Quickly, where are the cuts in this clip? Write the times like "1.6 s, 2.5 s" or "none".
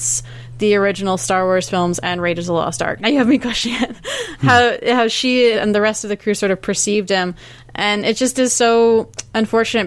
3.0 s, 4.4 s, 5.5 s